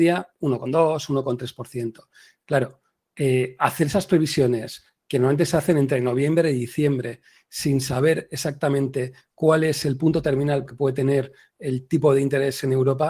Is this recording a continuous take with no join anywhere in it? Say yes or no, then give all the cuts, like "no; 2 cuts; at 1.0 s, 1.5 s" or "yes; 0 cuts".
no; 1 cut; at 10.7 s